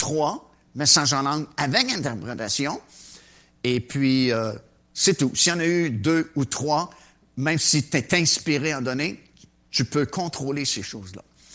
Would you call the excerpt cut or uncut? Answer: uncut